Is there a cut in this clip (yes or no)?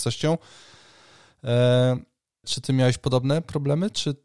yes